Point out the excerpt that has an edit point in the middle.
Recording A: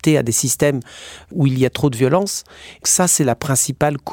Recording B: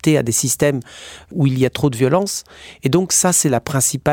A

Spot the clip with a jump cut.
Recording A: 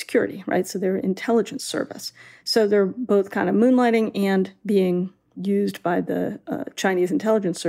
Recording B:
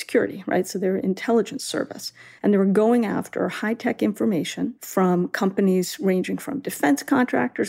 B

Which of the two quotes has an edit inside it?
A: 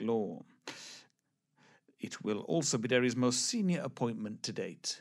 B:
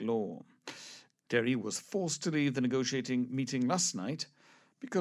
B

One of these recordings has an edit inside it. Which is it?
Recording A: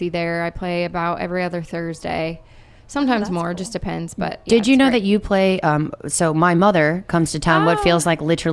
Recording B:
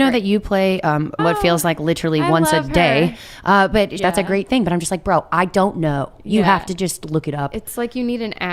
B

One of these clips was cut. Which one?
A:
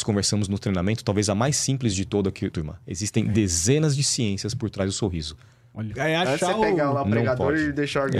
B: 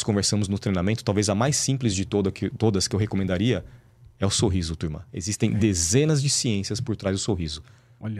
A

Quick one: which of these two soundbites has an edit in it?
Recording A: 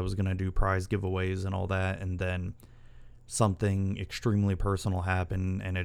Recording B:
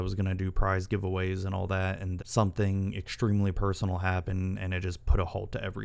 B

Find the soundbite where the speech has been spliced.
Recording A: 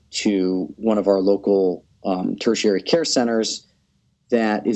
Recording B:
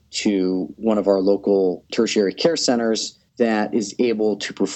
B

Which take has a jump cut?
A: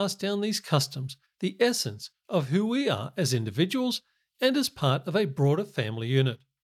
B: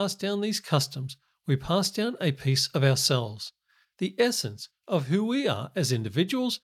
A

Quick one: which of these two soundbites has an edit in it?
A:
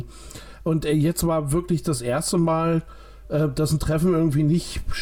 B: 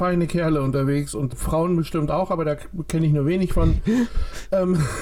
B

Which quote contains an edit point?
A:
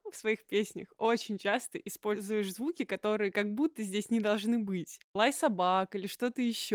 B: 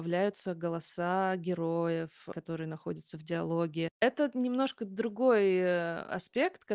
B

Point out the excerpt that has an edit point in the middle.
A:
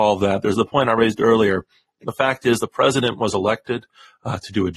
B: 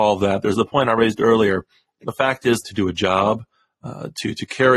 B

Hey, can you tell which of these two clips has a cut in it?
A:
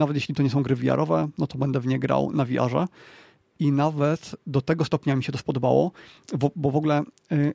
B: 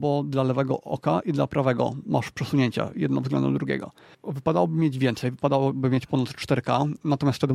B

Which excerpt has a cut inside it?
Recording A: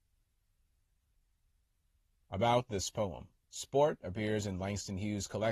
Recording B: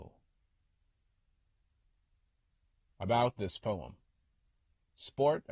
A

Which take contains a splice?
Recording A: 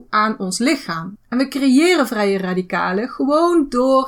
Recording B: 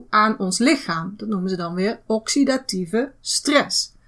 A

